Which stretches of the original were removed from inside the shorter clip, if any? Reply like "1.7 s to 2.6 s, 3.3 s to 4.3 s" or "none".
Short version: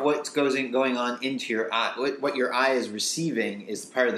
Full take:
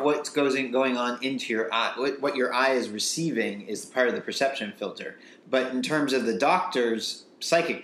none